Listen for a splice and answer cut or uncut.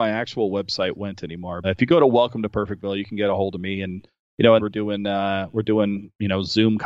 cut